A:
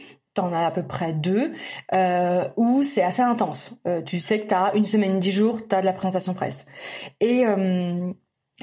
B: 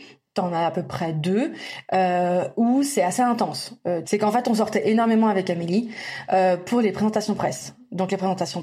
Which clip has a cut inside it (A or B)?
B